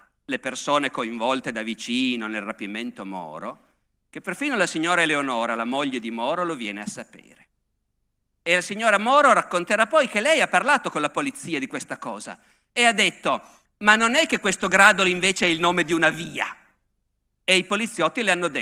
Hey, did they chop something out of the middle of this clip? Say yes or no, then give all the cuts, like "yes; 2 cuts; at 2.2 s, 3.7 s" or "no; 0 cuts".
no; 0 cuts